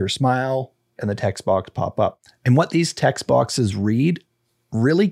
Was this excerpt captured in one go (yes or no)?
no